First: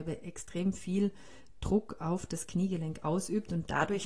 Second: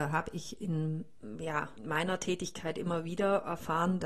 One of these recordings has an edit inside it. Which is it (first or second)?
second